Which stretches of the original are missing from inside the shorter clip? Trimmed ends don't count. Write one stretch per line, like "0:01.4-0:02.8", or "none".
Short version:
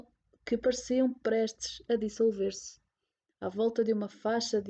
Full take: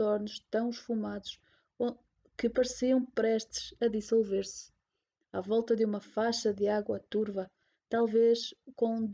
none